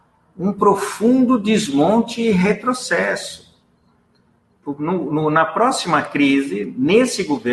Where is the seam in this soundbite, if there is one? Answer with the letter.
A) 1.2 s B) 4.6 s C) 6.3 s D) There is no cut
B